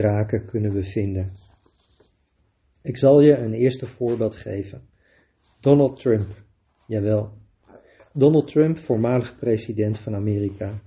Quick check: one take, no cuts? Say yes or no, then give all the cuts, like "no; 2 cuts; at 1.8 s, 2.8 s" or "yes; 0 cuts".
yes; 0 cuts